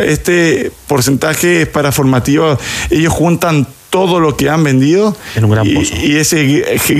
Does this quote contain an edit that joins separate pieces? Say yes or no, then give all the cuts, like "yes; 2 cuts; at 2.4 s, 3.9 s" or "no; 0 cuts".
no; 0 cuts